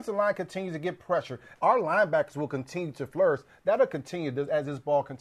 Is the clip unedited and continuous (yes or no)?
no